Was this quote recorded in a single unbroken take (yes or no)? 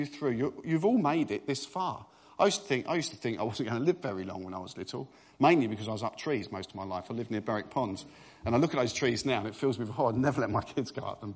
yes